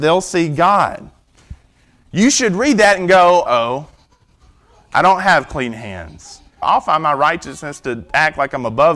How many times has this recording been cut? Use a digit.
2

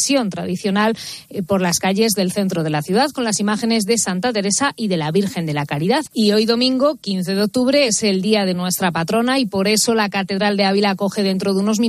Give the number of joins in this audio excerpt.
2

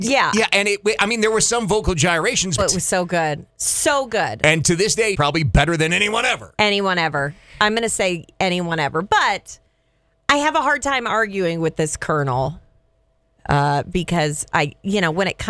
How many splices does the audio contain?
2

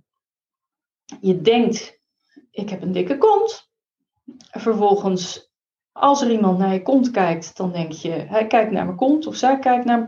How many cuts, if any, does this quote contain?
0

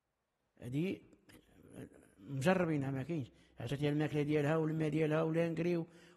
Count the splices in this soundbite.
0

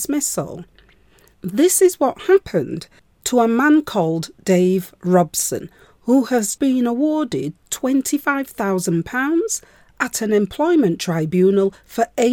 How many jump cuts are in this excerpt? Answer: 2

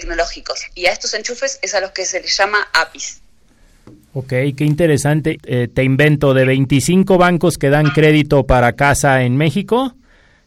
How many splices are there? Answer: 1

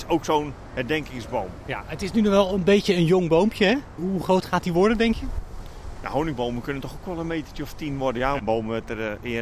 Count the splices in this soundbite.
2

